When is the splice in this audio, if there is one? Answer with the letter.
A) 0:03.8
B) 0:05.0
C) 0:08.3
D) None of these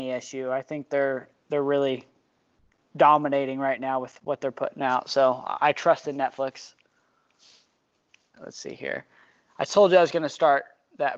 C